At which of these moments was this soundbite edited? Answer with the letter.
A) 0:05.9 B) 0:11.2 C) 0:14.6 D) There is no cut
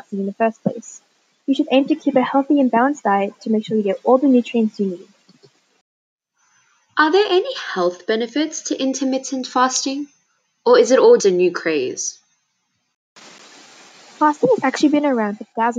B